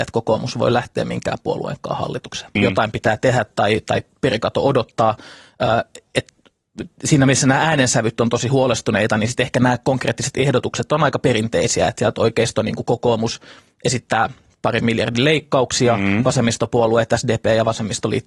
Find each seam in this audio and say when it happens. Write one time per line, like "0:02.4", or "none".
0:02.6